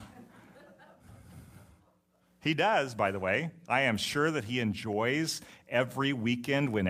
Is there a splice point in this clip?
no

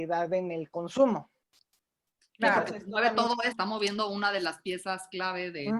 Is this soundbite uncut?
no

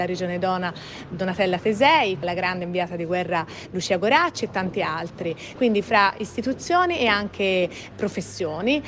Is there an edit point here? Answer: yes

